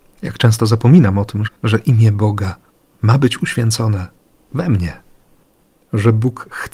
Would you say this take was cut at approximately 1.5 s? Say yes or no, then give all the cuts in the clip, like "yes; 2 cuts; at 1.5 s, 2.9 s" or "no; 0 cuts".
yes; 1 cut; at 1.5 s